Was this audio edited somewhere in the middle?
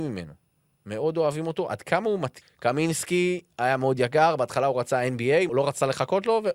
yes; 2 cuts; at 2.4 s, 5.5 s

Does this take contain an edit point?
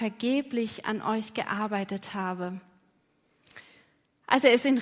no; 0 cuts

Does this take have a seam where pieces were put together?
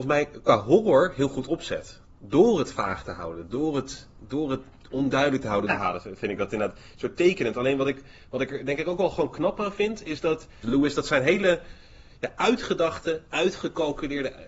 yes; 2 cuts; at 5.7 s, 10.6 s

